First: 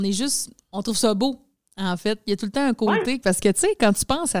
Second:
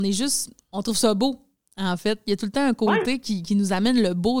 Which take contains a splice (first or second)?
first